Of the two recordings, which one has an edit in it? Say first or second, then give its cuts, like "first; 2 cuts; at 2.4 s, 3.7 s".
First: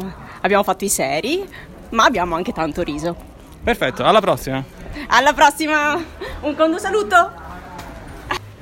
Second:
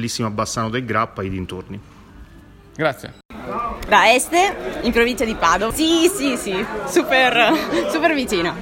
second; 2 cuts; at 3.9 s, 5.7 s